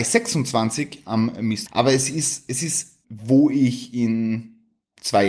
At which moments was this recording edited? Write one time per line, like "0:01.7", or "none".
0:01.7
0:03.0